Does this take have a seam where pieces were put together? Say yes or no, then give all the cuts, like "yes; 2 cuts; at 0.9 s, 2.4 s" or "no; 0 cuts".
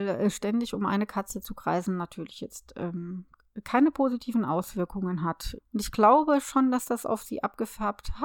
yes; 1 cut; at 5.6 s